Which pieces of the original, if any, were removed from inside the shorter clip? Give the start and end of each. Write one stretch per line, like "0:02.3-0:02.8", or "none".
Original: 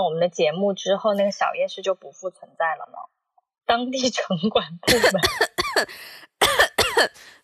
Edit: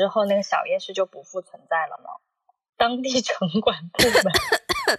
none